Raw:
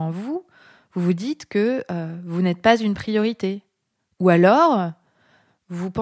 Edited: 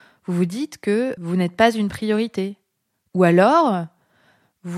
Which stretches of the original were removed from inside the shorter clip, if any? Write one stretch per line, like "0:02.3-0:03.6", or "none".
0:01.9-0:02.2